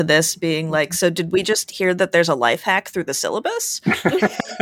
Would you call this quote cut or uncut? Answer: uncut